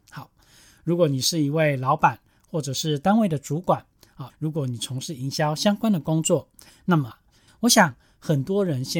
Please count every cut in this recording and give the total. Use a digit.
2